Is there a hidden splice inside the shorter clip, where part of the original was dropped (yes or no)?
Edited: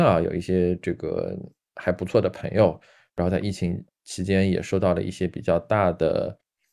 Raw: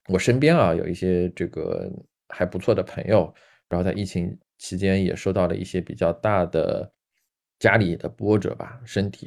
no